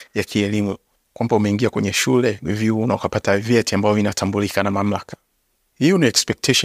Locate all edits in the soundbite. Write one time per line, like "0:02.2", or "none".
none